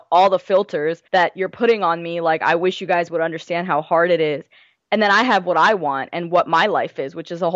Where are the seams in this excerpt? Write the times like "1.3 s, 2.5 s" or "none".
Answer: 1.1 s